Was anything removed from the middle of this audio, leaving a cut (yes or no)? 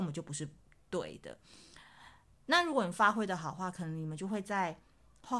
no